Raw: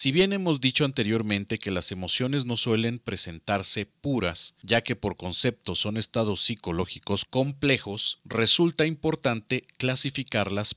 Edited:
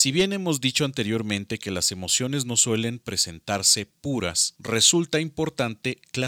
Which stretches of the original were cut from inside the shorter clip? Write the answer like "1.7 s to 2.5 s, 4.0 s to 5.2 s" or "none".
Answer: 4.6 s to 8.2 s